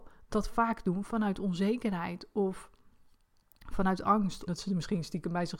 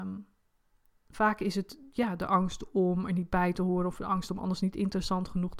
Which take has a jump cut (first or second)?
first